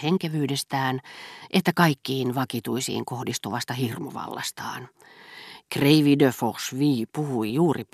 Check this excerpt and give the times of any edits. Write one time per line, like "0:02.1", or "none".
none